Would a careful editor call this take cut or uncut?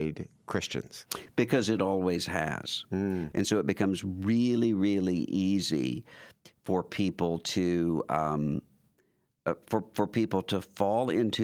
cut